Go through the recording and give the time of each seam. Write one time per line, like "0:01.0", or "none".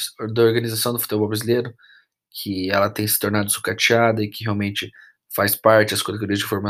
none